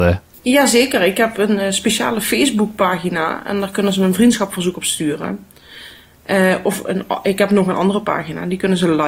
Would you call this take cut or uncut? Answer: uncut